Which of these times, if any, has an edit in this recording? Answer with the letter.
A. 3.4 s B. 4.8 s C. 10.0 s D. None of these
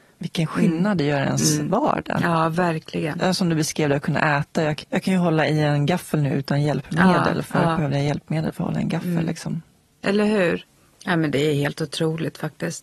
B